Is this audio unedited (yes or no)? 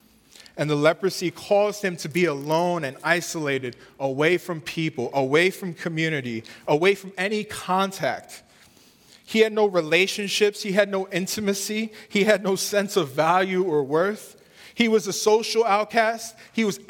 yes